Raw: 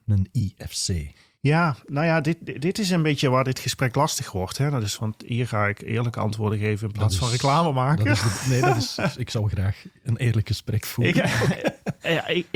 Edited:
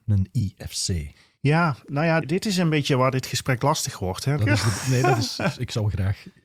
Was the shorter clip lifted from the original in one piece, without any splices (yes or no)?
no